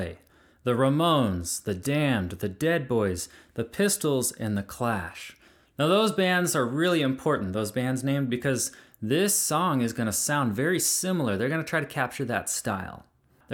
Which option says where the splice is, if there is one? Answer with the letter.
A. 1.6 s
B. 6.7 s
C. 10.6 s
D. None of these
D